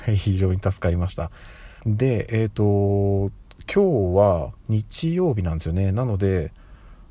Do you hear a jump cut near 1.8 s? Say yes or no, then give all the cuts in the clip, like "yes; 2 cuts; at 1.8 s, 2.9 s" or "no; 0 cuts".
yes; 1 cut; at 1.8 s